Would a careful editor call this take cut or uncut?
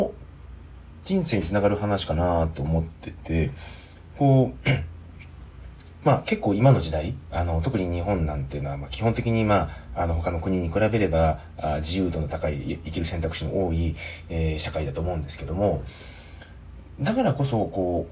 uncut